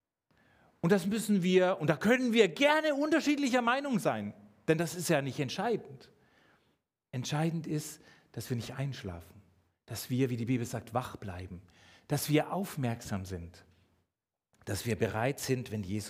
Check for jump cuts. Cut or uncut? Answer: uncut